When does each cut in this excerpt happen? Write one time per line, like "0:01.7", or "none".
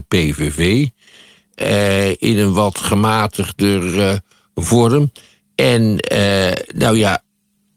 none